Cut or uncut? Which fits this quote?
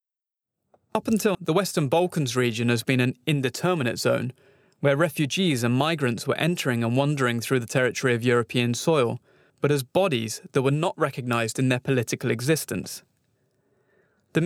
cut